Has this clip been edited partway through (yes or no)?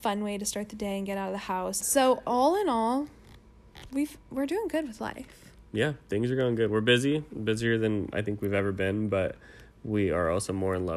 yes